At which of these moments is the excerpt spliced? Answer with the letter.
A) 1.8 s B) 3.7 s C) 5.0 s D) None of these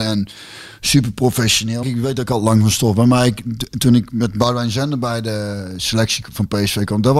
A